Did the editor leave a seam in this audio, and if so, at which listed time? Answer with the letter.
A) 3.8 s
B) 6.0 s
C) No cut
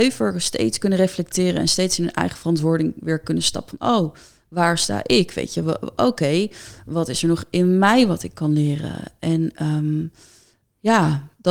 C